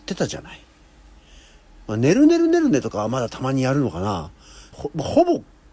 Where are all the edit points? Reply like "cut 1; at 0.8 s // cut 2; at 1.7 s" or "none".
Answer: cut 1; at 4.7 s